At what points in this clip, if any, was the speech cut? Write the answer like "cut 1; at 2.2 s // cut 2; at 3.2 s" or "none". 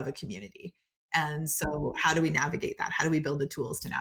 none